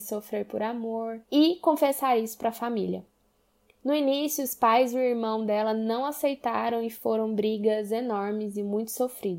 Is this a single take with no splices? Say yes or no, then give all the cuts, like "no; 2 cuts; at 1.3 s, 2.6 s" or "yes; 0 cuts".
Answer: no; 1 cut; at 1.2 s